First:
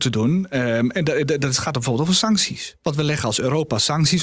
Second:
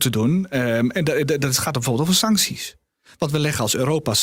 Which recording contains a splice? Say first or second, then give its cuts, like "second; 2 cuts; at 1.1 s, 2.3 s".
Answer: first; 1 cut; at 2.8 s